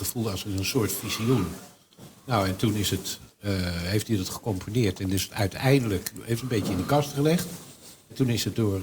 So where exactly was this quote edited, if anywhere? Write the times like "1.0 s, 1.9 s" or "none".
none

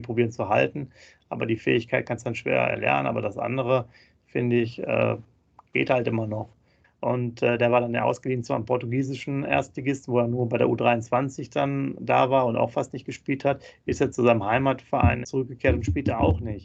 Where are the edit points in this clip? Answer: 6.8 s, 15.2 s

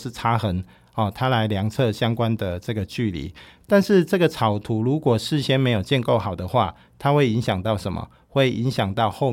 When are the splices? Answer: none

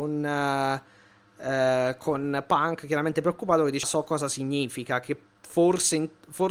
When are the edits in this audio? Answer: 3.8 s

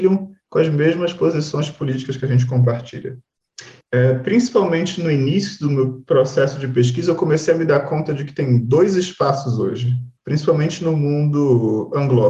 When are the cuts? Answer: 3.8 s, 10.2 s

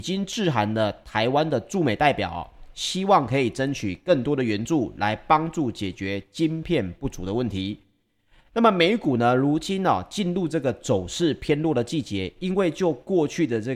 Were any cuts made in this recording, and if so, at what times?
none

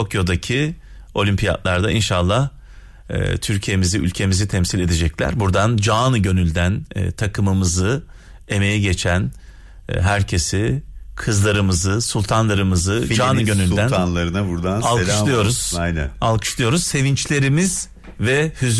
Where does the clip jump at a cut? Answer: none

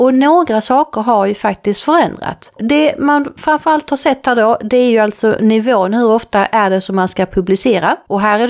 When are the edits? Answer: none

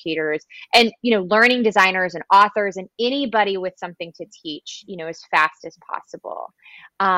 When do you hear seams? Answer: none

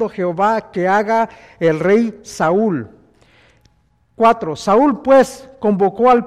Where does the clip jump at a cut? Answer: none

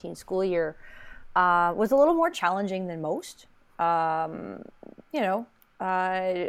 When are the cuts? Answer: none

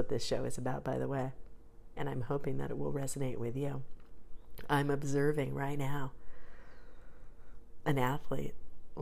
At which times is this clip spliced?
2.0 s

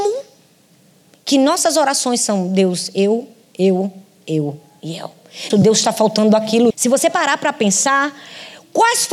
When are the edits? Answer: 5.5 s, 6.7 s

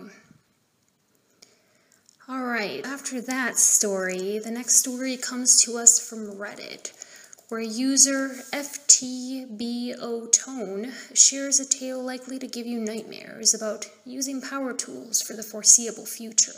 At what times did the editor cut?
2.8 s

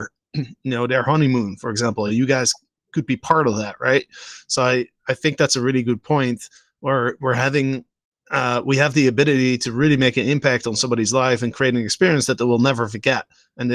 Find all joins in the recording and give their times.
none

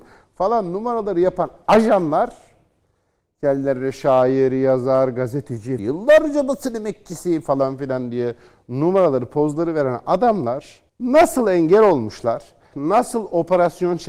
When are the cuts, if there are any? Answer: 5.8 s, 10.9 s, 12.7 s

